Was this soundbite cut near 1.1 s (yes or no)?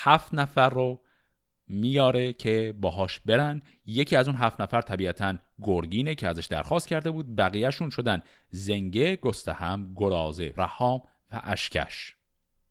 no